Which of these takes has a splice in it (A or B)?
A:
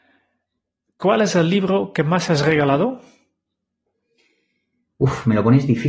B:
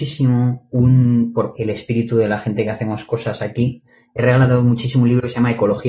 B